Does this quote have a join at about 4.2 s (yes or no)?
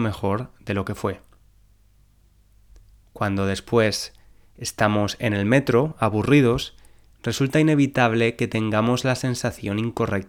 no